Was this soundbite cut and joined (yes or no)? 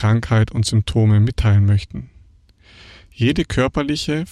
no